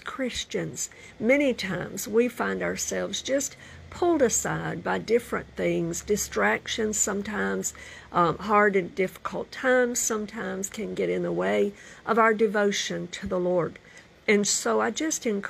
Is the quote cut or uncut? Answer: uncut